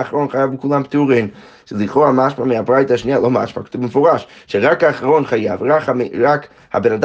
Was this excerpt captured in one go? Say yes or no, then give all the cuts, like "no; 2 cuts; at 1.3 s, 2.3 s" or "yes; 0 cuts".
yes; 0 cuts